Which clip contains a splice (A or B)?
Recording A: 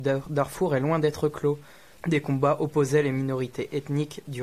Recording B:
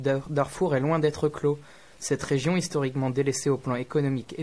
A